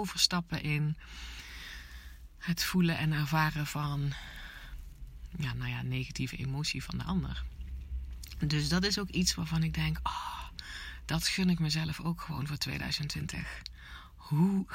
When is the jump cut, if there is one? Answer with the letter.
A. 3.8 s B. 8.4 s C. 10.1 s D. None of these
D